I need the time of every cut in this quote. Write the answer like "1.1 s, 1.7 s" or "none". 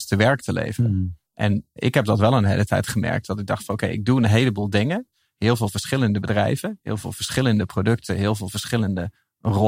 1.8 s